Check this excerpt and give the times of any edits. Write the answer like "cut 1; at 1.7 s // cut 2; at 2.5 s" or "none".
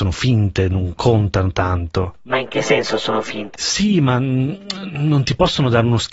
cut 1; at 3.6 s